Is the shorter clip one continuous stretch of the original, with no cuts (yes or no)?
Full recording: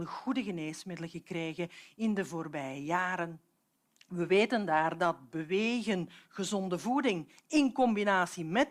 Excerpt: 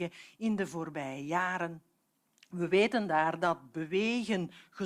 yes